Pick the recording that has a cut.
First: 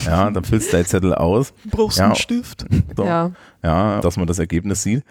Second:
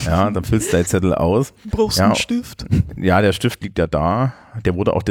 first; 2 cuts; at 3.0 s, 4.0 s

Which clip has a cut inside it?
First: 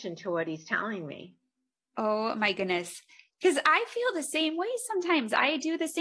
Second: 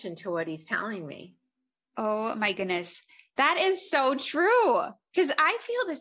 first; 1 cut; at 3.3 s

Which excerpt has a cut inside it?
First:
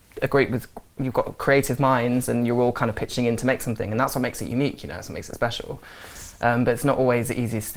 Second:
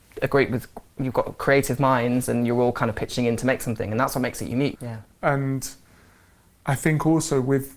second; 1 cut; at 4.8 s

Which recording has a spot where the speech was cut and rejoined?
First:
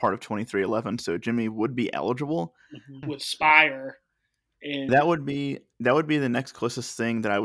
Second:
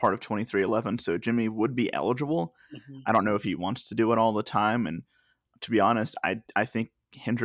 first; 2 cuts; at 3.0 s, 4.9 s

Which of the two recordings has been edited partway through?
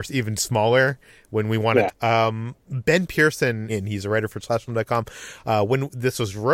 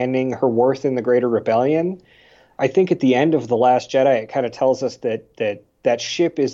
first; 2 cuts; at 1.9 s, 3.7 s

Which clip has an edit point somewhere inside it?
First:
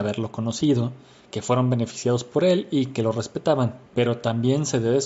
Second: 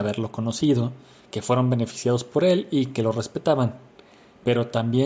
first; 1 cut; at 3.9 s

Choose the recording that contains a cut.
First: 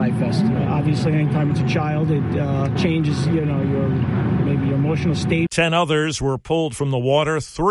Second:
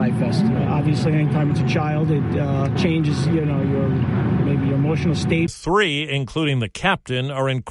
second; 1 cut; at 5.5 s

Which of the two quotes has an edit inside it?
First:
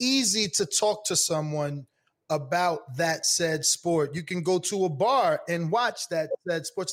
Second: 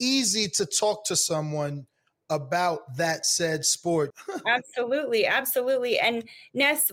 second; 1 cut; at 4.1 s

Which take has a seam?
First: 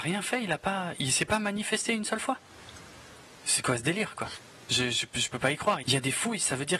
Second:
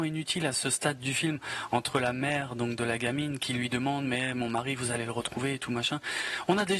first; 1 cut; at 5.8 s

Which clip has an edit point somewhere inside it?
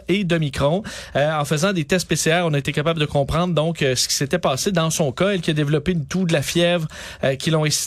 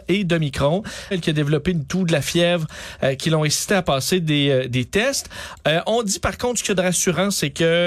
second; 1 cut; at 1.1 s

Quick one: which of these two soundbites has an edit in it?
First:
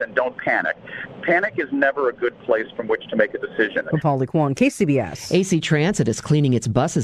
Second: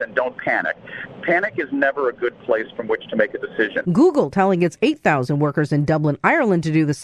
second; 1 cut; at 3.8 s

